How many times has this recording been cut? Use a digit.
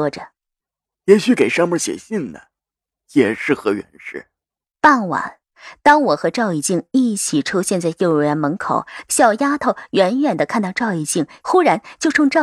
3